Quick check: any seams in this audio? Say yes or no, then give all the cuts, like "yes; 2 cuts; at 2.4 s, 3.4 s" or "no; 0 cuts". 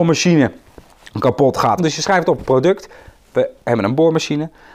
yes; 1 cut; at 1.8 s